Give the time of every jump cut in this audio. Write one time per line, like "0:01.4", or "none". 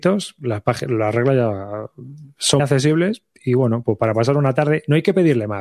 0:02.6